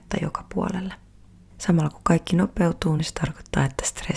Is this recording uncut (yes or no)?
yes